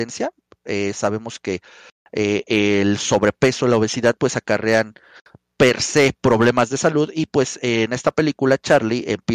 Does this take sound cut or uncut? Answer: uncut